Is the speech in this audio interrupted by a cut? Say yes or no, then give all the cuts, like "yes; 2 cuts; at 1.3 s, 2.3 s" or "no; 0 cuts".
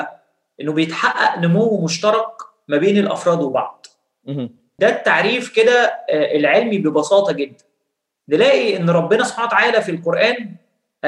yes; 1 cut; at 4.8 s